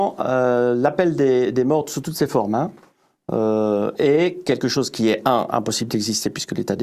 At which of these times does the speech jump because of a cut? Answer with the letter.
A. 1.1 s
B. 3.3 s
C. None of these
C